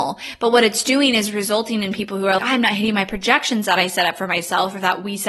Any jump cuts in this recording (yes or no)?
yes